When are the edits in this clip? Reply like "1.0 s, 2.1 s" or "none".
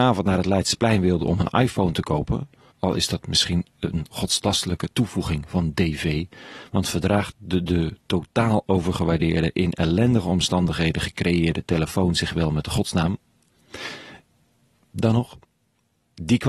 2.7 s